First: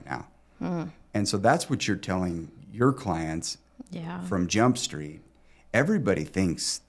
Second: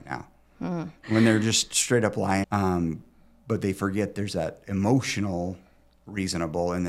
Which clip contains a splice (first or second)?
second